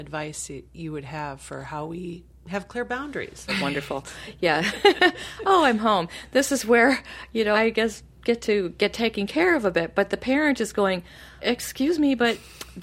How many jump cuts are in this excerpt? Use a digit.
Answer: 3